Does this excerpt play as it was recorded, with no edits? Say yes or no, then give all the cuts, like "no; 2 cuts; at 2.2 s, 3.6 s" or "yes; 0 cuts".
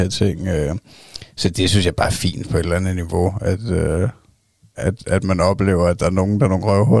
yes; 0 cuts